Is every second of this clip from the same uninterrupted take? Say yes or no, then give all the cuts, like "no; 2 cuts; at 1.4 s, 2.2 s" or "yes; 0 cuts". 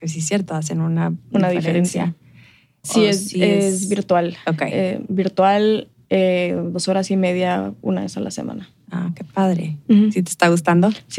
no; 1 cut; at 2.8 s